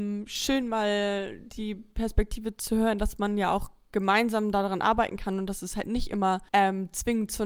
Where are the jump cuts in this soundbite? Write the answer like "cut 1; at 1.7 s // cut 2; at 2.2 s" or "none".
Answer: cut 1; at 6.5 s